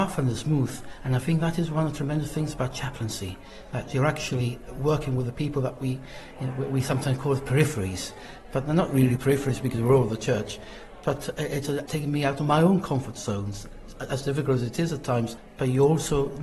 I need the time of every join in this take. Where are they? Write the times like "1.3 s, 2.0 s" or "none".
11.9 s